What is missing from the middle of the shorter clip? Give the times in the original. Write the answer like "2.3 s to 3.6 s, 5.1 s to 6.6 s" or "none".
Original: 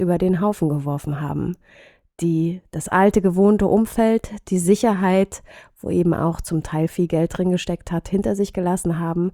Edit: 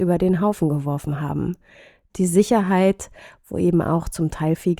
2.1 s to 4.4 s